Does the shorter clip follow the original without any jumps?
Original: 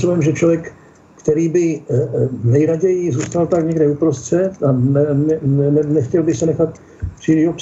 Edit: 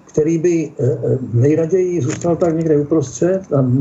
yes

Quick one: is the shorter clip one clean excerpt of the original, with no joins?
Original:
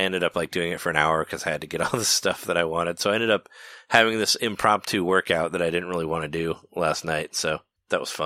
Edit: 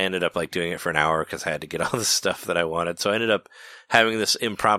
yes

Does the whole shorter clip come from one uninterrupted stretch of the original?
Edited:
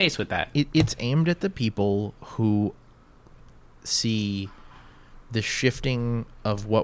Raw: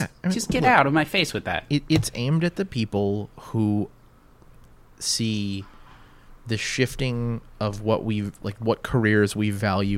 yes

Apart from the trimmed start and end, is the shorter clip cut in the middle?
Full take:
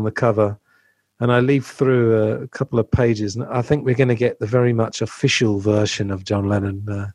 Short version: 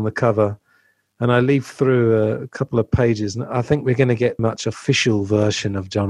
yes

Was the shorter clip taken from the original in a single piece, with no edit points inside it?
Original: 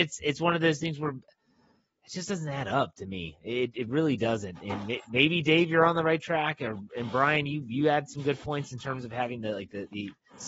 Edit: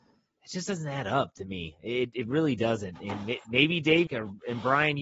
no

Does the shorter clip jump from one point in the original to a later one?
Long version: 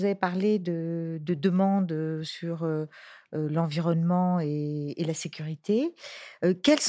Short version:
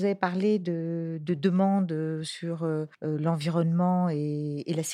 yes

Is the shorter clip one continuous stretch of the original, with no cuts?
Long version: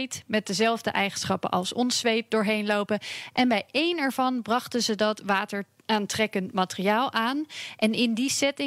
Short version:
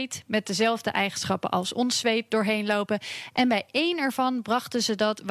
yes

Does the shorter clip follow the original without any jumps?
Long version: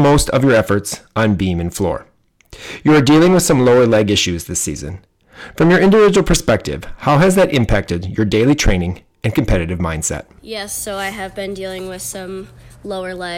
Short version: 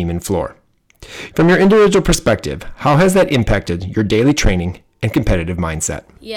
no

